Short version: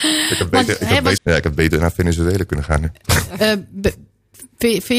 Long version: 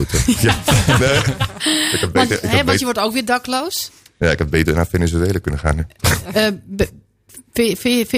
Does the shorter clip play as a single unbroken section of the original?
no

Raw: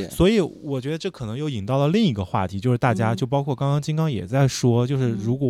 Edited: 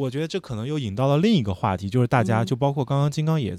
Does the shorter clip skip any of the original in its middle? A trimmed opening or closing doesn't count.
no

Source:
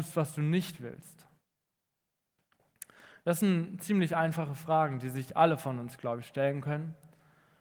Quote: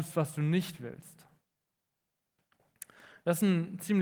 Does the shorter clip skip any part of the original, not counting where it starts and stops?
no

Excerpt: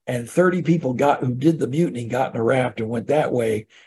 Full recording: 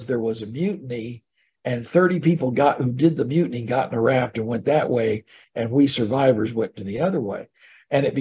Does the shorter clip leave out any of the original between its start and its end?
no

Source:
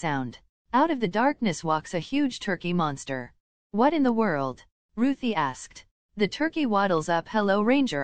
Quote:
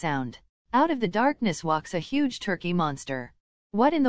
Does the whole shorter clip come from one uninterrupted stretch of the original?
yes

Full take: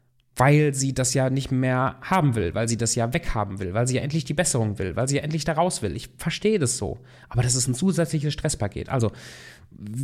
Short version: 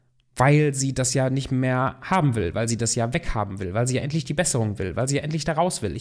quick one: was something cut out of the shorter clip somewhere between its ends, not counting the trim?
no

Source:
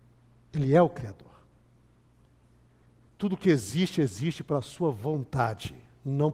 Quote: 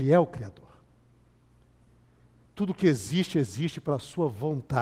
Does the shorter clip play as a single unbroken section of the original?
yes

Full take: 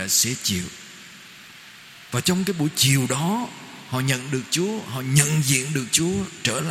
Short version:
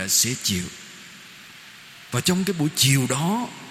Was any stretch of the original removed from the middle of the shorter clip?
no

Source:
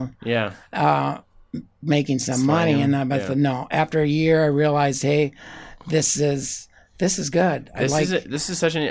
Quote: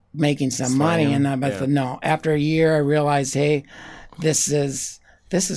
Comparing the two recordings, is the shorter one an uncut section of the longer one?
yes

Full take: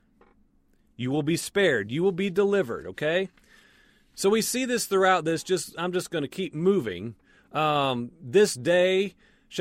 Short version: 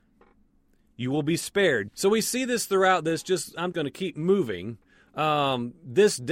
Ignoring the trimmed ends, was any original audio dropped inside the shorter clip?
yes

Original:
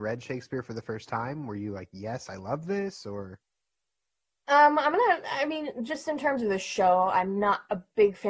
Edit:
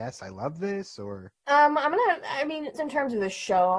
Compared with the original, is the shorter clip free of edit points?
no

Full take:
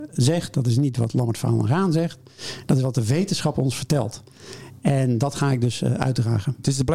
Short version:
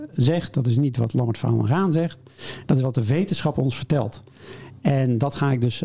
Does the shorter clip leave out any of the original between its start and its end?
no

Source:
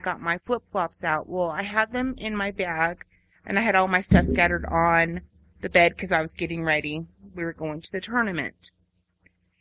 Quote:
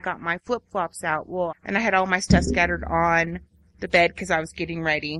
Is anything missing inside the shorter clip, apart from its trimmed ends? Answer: yes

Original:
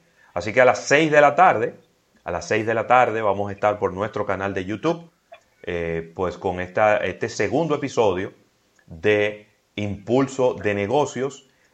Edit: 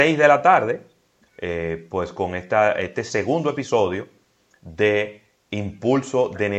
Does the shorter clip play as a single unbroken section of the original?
no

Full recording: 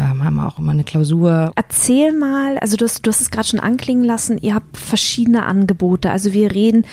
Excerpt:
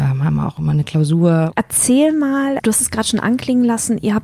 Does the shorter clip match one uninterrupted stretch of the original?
no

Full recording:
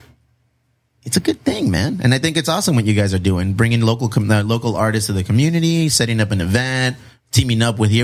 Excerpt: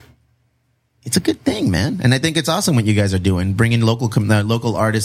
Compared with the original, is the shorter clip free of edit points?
yes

